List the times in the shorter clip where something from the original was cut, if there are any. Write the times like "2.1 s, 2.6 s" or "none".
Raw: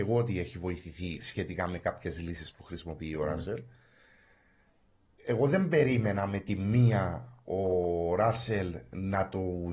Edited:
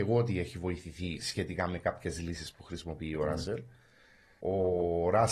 4.4 s